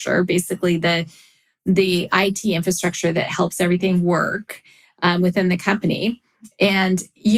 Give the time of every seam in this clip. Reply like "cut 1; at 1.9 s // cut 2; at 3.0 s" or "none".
none